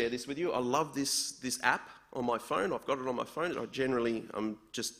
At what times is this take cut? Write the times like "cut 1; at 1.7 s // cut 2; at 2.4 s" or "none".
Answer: cut 1; at 3.5 s